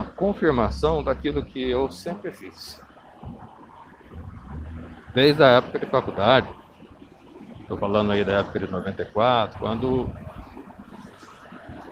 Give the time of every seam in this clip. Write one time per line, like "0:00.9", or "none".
0:09.5